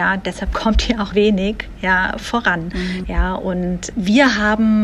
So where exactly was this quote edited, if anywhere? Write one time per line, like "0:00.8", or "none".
0:01.1
0:03.0